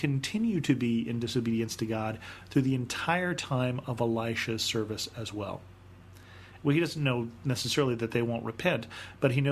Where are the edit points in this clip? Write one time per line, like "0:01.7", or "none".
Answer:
0:06.6

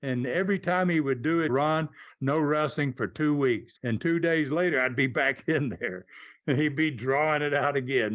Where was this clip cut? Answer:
0:01.5
0:03.8

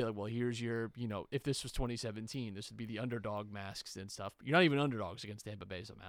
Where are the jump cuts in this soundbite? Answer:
none

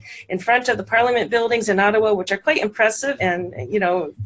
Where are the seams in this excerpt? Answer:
0:03.2

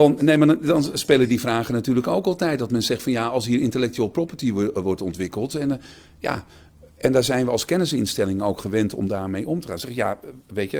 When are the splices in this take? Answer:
none

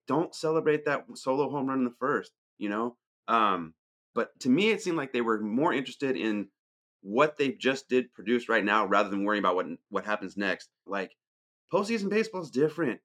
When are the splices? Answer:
0:04.1
0:10.9

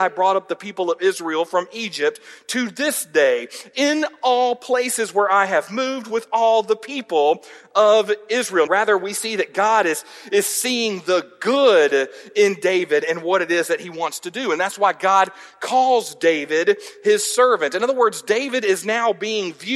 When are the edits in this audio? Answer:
0:08.7

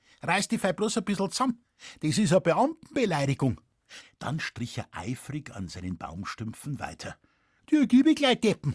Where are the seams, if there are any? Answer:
0:04.0
0:07.6

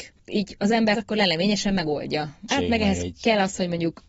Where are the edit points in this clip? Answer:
0:00.9
0:02.5

